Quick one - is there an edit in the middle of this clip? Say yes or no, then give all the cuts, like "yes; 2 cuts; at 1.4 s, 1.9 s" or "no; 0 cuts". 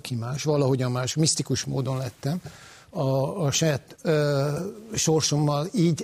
no; 0 cuts